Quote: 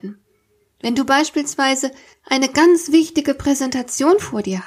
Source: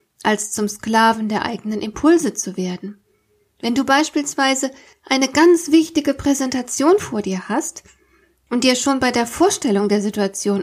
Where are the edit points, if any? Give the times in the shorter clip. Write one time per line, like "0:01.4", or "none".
none